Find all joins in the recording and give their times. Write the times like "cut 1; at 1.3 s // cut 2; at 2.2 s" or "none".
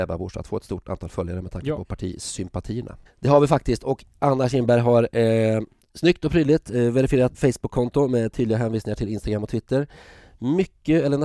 cut 1; at 3.1 s // cut 2; at 5.8 s // cut 3; at 7.3 s